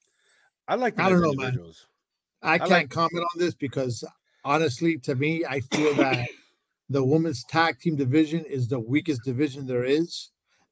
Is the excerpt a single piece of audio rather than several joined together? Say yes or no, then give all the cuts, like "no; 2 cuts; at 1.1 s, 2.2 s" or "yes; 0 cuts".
yes; 0 cuts